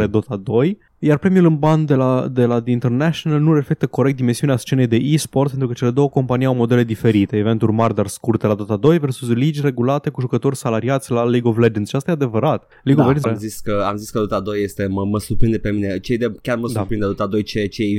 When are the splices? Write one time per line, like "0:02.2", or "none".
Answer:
0:13.2